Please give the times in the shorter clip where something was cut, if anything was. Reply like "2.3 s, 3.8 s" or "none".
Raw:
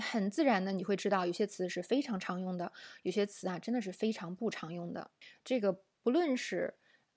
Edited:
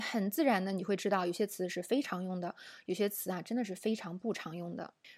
2.0 s